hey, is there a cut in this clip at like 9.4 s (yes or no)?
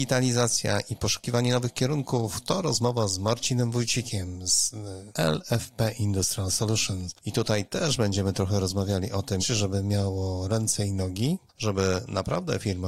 yes